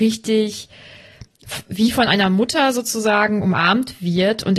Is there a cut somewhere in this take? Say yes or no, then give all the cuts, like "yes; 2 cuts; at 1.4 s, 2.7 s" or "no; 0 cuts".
no; 0 cuts